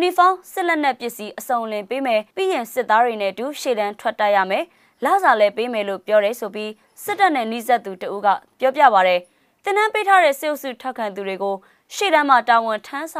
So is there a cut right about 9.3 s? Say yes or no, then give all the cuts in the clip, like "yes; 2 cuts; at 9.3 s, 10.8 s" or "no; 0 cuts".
no; 1 cut; at 2.3 s